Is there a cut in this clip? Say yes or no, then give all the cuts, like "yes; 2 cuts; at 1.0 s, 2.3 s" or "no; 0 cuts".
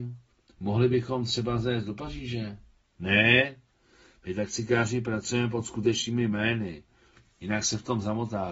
yes; 1 cut; at 2.9 s